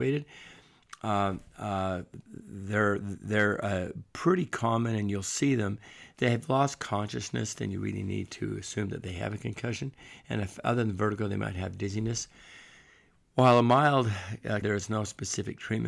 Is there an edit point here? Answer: yes; 2 cuts; at 6.1 s, 14.6 s

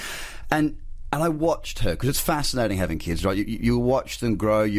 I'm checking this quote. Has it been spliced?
no; 0 cuts

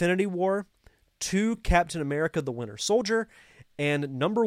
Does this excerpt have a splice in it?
no; 0 cuts

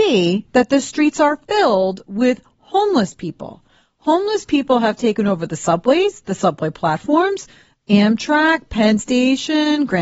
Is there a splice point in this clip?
no; 0 cuts

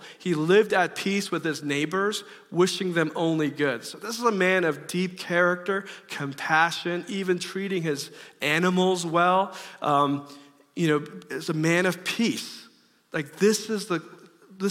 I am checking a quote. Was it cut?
no; 0 cuts

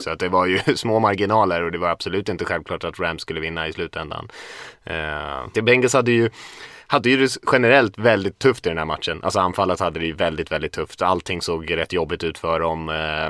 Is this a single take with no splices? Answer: no; 1 cut; at 5.5 s

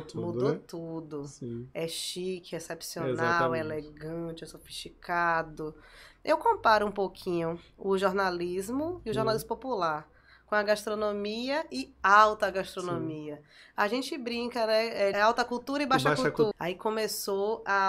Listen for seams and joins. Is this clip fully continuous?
no; 3 cuts; at 6.1 s, 15.1 s, 16.5 s

